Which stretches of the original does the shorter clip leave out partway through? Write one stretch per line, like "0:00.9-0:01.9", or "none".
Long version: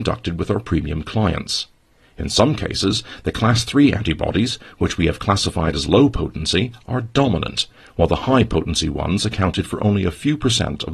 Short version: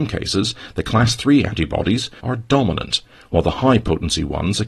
0:04.7-0:06.8